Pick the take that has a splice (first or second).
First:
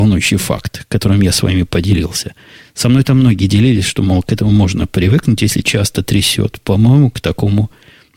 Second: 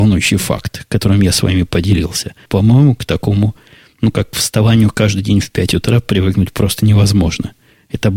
second